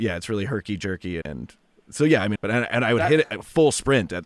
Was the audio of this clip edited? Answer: yes; 2 cuts; at 1.2 s, 2.3 s

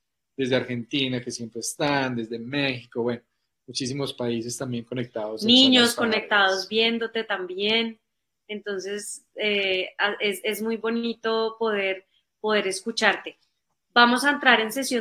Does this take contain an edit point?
no; 0 cuts

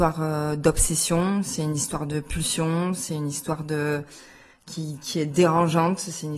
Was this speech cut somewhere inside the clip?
no; 0 cuts

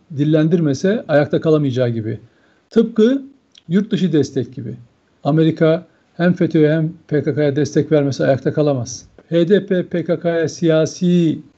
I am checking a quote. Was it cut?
yes; 1 cut; at 9.2 s

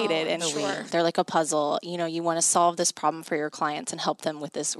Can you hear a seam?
yes; 1 cut; at 0.9 s

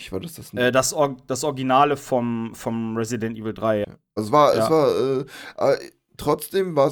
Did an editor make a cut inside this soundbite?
yes; 1 cut; at 3.8 s

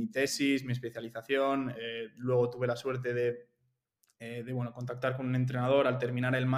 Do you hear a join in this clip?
no; 0 cuts

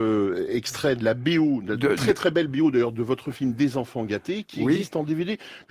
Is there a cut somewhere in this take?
no; 0 cuts

